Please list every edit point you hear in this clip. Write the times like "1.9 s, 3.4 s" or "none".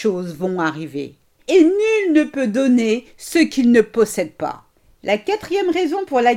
1.4 s